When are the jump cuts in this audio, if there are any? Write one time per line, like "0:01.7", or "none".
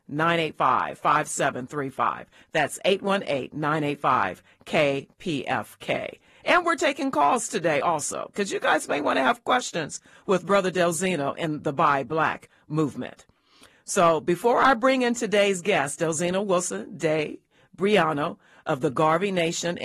none